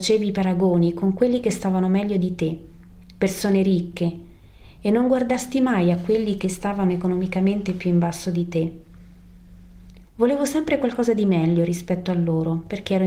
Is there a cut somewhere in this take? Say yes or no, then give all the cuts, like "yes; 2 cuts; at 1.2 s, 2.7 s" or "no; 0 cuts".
yes; 1 cut; at 10.0 s